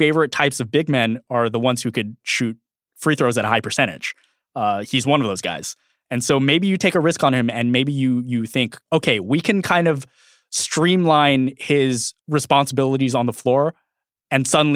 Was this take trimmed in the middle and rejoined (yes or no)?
yes